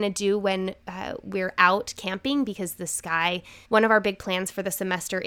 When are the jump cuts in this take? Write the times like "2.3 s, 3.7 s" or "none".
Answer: 3.6 s